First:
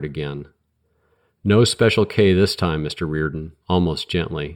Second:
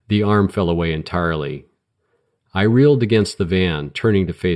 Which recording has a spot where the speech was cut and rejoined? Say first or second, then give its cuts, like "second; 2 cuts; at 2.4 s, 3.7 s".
first; 1 cut; at 3.6 s